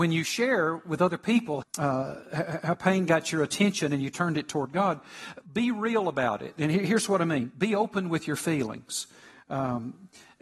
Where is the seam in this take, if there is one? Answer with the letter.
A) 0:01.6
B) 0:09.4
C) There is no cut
A